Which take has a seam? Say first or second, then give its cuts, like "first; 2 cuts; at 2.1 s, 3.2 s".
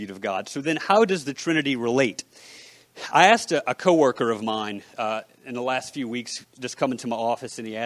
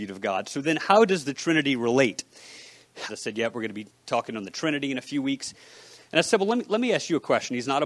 second; 1 cut; at 3.1 s